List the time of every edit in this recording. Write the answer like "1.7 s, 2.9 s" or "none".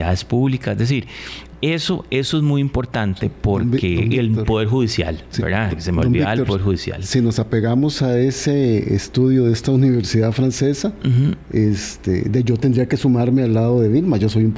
none